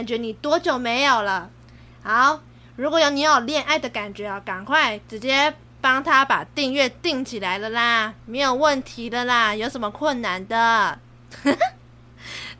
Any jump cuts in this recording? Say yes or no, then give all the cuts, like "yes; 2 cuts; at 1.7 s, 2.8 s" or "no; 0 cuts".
no; 0 cuts